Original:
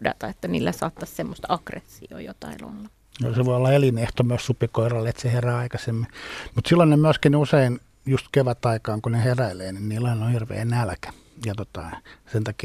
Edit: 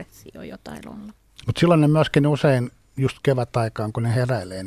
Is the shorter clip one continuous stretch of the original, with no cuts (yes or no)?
no